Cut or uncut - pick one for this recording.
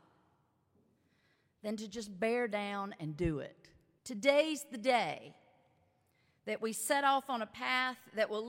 cut